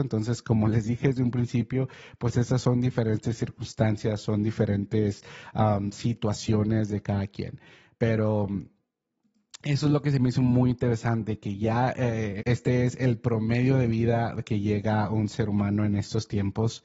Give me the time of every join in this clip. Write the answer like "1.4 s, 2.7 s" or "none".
12.4 s